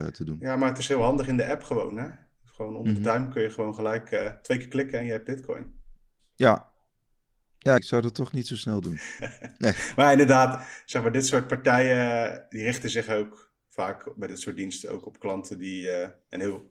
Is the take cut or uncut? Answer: cut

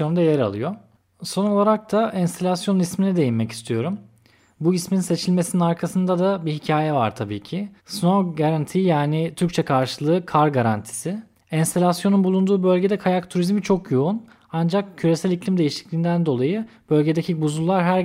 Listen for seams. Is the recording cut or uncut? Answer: cut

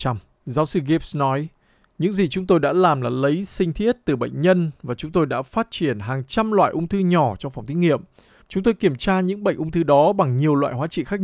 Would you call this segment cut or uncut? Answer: uncut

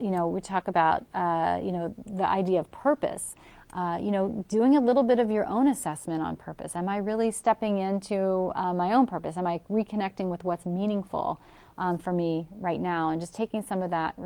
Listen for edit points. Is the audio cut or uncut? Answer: uncut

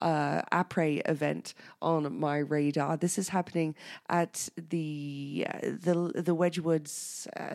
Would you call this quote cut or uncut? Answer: uncut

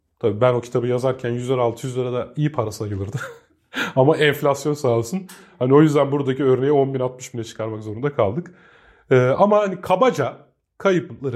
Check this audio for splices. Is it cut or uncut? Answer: uncut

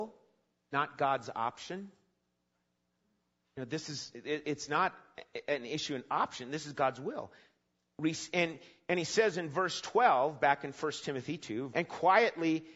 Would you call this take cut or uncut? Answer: cut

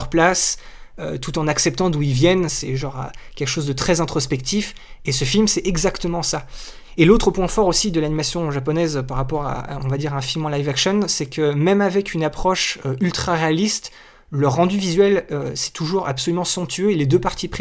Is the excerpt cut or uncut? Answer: uncut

